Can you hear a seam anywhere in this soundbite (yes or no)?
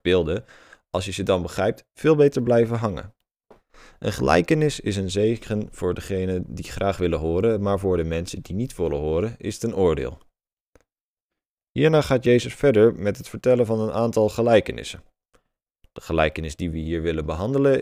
no